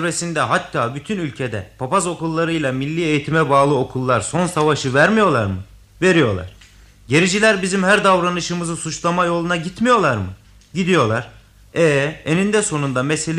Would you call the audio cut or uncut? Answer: uncut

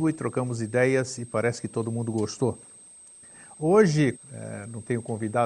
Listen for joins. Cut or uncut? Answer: cut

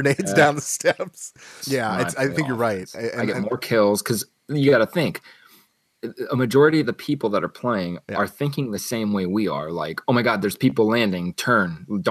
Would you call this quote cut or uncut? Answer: cut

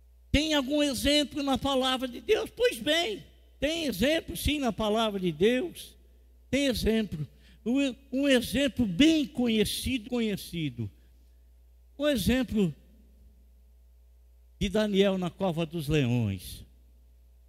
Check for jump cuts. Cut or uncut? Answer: cut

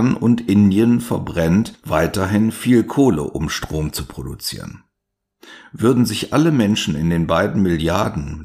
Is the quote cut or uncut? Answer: uncut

